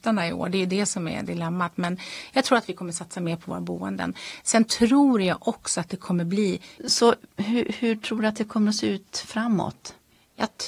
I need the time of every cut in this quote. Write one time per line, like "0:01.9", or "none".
0:06.8